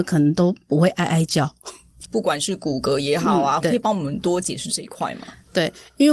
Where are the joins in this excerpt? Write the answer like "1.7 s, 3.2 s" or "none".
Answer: 2.0 s, 3.6 s